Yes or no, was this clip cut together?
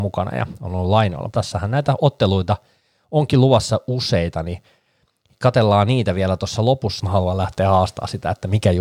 yes